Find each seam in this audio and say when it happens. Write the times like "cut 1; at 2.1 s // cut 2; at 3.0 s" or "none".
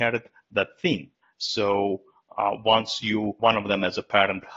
cut 1; at 1.2 s // cut 2; at 3.4 s